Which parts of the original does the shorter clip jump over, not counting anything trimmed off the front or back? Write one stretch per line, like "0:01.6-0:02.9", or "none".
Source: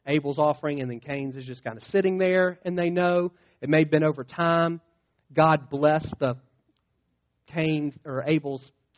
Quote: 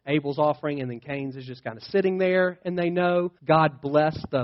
0:03.4-0:05.3